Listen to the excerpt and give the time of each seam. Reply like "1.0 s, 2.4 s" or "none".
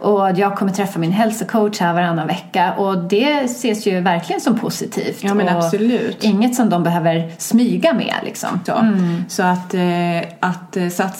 8.7 s